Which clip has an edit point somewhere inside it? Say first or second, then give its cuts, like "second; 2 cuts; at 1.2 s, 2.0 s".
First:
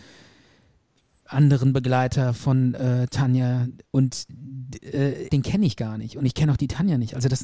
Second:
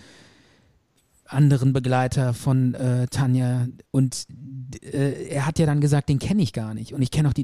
first; 1 cut; at 5.3 s